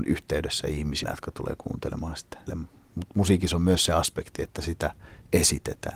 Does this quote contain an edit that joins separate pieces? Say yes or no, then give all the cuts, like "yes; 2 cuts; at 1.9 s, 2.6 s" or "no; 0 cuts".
yes; 2 cuts; at 1.0 s, 2.5 s